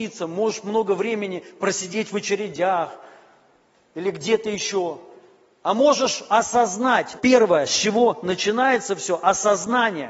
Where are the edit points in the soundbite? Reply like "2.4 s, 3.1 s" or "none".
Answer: 7.2 s